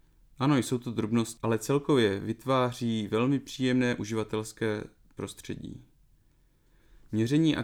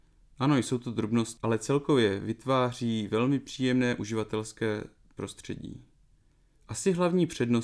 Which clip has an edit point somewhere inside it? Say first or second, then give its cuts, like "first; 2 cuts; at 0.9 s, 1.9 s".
second; 1 cut; at 6.5 s